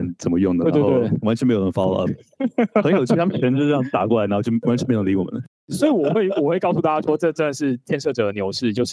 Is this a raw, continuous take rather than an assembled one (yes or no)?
yes